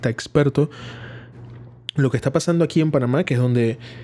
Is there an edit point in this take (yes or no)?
yes